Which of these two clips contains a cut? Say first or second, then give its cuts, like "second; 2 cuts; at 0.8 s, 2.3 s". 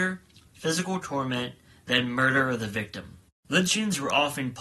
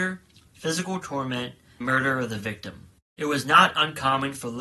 second; 2 cuts; at 1.8 s, 3.1 s